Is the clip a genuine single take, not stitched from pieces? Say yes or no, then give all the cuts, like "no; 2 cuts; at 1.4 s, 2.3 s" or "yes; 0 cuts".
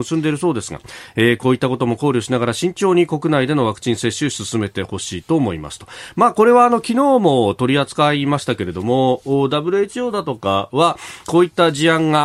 no; 1 cut; at 11.2 s